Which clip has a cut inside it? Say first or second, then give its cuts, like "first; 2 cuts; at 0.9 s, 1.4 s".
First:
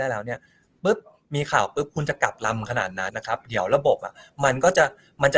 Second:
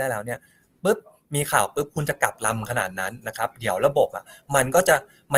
first; 1 cut; at 3.1 s